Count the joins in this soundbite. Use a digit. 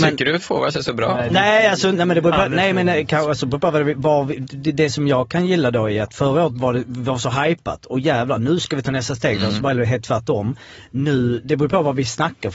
0